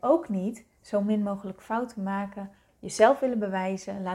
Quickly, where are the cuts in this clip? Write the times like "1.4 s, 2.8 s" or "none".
2.7 s